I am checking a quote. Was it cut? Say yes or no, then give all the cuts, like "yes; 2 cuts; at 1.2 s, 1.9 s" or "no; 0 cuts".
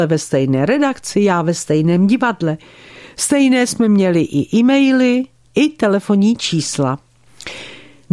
no; 0 cuts